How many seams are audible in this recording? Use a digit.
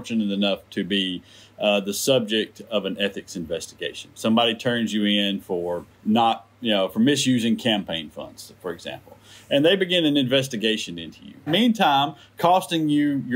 2